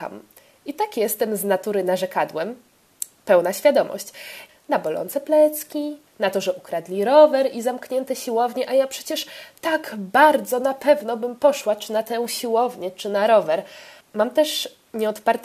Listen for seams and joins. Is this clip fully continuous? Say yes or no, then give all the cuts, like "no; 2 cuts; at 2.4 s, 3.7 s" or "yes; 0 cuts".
no; 3 cuts; at 4.5 s, 6.1 s, 14.0 s